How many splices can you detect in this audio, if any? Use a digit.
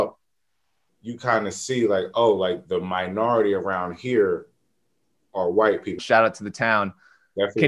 1